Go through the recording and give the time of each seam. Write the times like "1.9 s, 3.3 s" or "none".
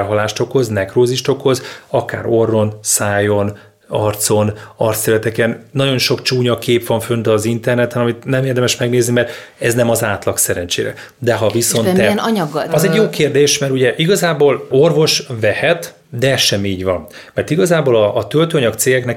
14.7 s, 16.0 s